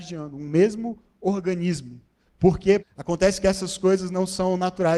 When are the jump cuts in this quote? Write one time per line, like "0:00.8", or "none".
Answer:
0:02.8